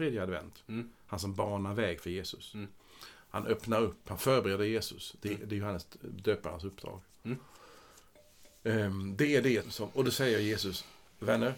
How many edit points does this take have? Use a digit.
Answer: 1